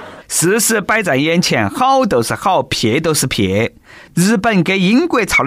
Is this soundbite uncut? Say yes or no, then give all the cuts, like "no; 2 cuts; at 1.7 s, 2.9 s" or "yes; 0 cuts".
yes; 0 cuts